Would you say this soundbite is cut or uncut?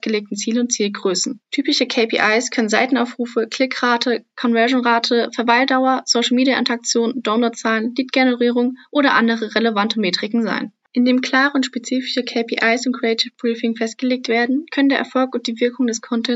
uncut